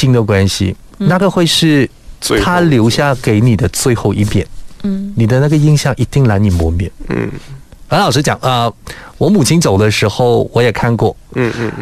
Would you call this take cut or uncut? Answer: uncut